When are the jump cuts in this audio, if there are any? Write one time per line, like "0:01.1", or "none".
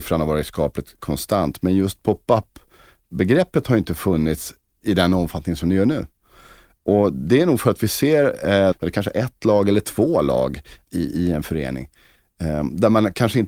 0:08.7